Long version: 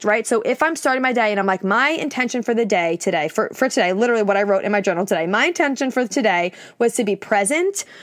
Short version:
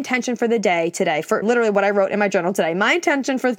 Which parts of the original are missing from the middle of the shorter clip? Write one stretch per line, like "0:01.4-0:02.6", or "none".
0:03.5-0:03.9